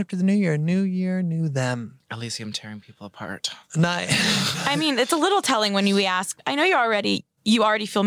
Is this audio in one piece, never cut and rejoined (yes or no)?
yes